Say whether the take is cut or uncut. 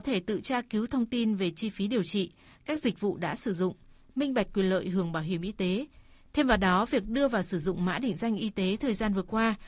uncut